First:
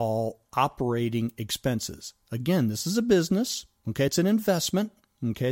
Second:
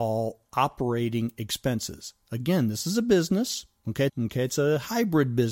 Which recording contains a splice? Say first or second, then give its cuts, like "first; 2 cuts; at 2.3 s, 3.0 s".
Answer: second; 1 cut; at 4.1 s